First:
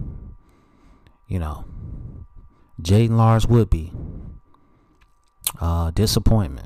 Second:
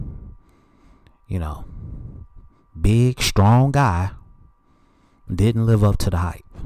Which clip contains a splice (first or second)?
first